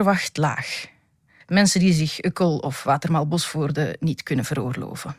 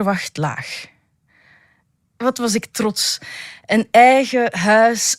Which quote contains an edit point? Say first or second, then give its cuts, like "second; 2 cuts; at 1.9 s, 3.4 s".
first; 1 cut; at 1.4 s